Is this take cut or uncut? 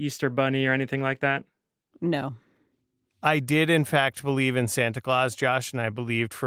uncut